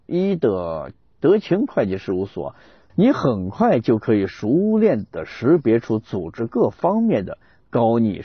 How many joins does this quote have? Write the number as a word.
one